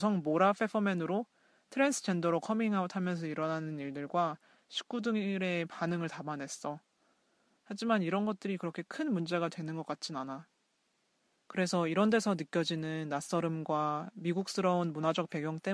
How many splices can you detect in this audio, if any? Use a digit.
2